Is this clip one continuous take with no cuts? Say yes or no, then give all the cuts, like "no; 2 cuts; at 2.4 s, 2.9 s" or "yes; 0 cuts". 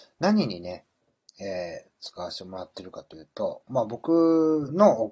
yes; 0 cuts